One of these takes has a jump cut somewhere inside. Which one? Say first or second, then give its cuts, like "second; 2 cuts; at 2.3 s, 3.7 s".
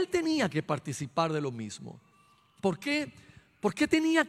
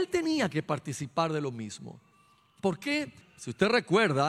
second; 1 cut; at 3.2 s